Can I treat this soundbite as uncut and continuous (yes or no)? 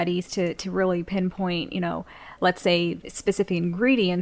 no